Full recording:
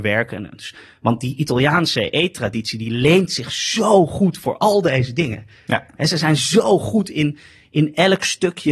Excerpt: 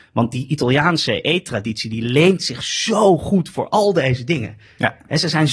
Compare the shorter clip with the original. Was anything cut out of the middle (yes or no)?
no